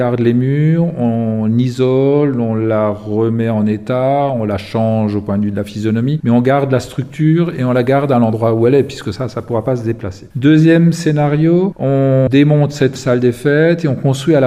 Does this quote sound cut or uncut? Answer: uncut